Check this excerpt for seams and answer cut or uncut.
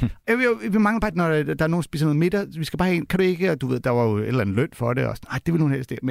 cut